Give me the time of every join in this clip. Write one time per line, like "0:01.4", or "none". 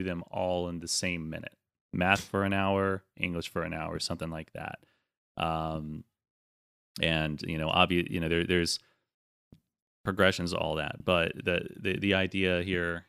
0:01.8